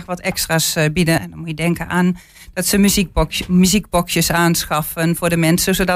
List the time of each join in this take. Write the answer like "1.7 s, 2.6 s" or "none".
1.2 s